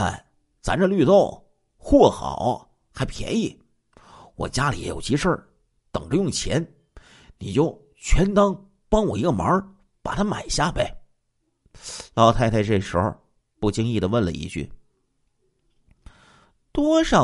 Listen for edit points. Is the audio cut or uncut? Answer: uncut